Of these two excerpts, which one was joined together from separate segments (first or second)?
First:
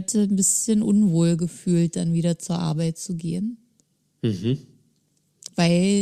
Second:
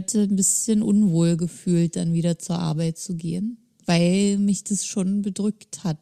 second